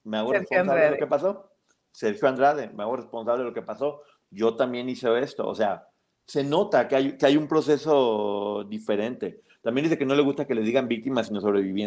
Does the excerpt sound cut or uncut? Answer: uncut